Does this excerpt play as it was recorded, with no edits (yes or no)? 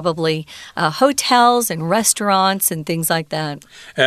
yes